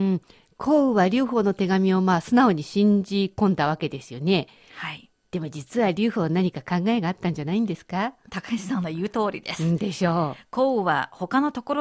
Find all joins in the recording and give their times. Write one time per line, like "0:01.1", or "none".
none